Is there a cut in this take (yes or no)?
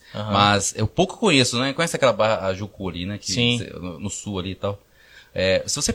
no